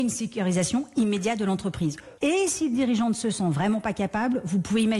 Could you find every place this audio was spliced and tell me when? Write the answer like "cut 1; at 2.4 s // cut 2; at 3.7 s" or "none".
cut 1; at 2.2 s